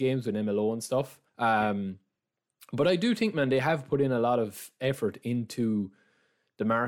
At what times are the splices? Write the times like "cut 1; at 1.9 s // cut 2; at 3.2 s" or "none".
cut 1; at 1.3 s